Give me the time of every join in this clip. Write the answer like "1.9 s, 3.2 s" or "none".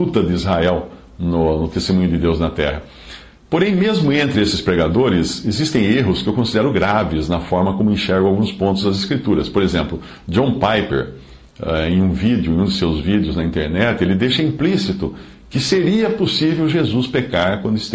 none